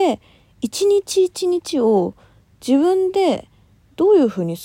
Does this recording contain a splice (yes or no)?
no